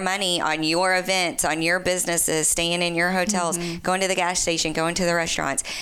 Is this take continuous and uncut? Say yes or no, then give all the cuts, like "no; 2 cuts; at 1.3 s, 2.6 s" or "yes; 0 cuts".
yes; 0 cuts